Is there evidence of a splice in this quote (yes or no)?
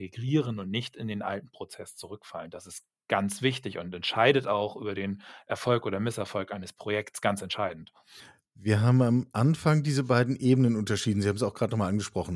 no